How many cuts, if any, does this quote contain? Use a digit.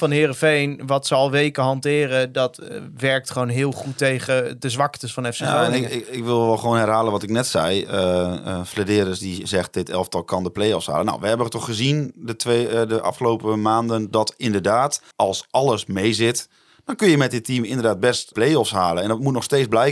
2